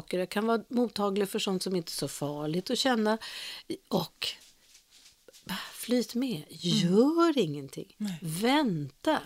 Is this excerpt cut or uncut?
uncut